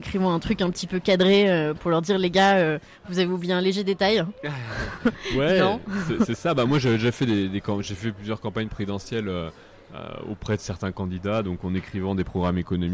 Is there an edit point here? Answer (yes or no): no